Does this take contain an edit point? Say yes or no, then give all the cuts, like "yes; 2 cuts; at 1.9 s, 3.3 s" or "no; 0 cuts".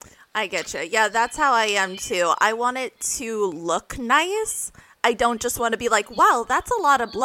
no; 0 cuts